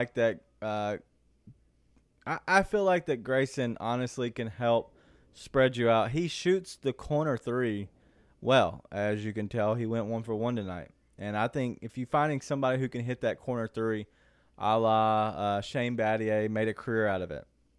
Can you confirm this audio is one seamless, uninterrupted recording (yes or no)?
yes